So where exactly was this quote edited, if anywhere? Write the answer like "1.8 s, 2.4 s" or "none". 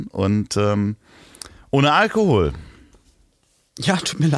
none